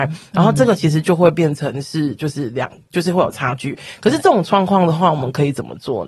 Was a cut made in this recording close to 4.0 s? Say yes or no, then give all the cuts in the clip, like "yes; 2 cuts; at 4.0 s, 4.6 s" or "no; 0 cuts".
no; 0 cuts